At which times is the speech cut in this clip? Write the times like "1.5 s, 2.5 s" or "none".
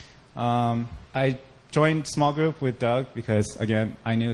1.0 s